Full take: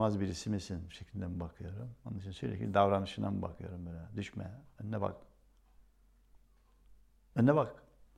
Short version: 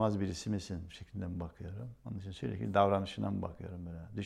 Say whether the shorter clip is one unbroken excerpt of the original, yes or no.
yes